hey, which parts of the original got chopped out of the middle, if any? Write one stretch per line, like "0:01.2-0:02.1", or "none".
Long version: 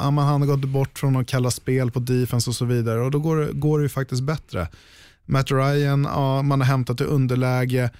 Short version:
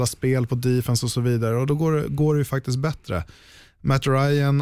none